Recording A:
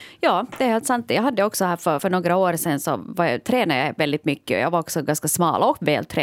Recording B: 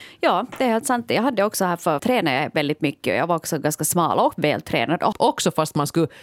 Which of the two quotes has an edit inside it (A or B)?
B